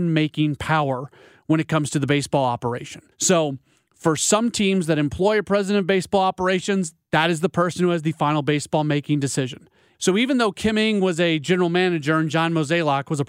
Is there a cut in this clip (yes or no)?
yes